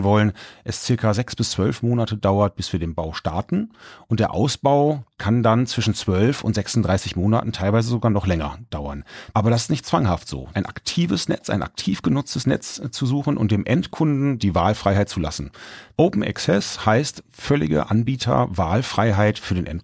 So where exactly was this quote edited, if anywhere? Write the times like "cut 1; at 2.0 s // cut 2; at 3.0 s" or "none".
cut 1; at 9.3 s // cut 2; at 10.5 s // cut 3; at 15.9 s